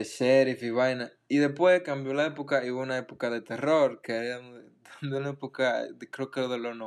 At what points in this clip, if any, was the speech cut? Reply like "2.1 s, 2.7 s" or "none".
none